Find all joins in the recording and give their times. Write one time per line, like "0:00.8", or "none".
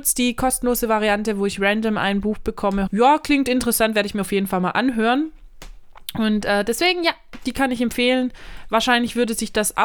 0:02.9